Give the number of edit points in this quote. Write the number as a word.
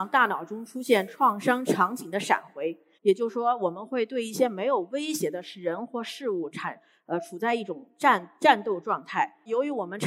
one